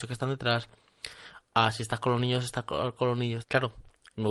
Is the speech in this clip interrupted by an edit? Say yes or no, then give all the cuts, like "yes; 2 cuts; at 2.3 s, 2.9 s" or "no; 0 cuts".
yes; 1 cut; at 3.4 s